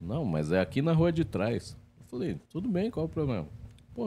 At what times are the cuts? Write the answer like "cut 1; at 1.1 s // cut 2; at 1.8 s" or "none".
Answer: cut 1; at 2.5 s